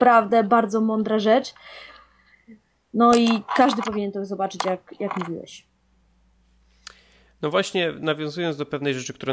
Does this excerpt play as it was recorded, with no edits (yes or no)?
yes